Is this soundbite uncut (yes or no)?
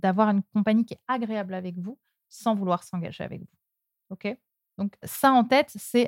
no